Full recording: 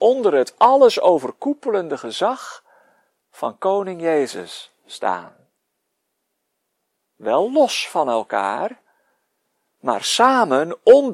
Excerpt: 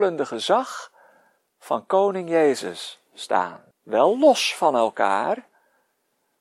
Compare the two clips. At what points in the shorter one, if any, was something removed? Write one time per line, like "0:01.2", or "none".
0:03.7